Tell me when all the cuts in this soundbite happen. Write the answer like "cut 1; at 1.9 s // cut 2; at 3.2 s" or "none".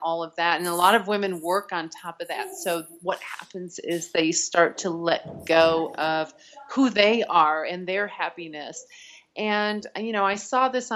none